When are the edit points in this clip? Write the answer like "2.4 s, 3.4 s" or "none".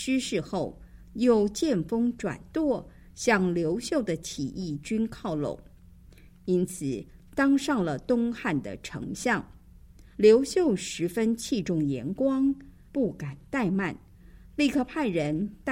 10.1 s, 12.9 s